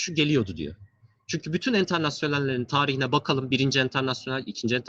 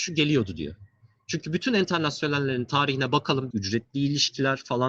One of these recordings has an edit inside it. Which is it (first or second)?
second